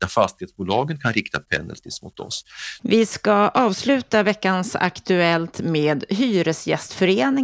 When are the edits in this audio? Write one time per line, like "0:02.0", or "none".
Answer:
0:02.8